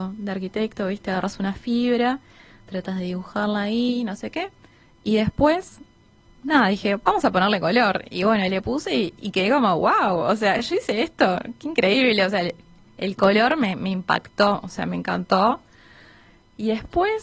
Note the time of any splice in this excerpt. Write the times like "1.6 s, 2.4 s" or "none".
none